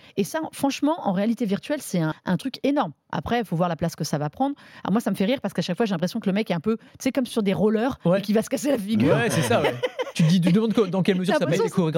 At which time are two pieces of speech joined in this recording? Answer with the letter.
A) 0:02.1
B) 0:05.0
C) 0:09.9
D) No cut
A